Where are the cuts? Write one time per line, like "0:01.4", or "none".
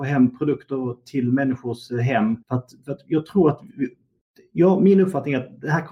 0:02.4